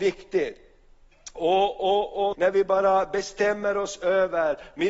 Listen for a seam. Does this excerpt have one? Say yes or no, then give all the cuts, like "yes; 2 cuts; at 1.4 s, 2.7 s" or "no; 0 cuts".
yes; 1 cut; at 2.3 s